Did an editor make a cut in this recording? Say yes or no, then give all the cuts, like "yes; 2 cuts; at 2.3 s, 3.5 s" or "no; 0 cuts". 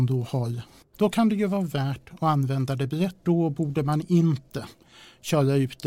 yes; 2 cuts; at 0.9 s, 3.2 s